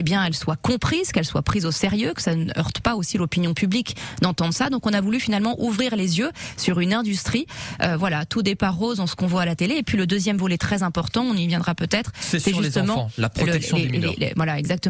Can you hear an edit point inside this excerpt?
no; 0 cuts

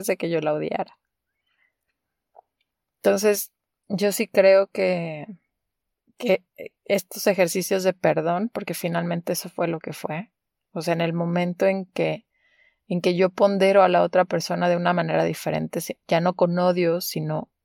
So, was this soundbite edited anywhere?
no; 0 cuts

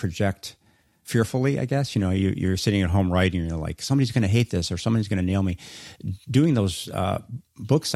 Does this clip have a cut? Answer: no; 0 cuts

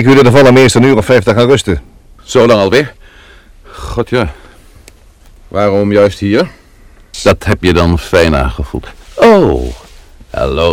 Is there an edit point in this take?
yes; 2 cuts; at 2.2 s, 7.1 s

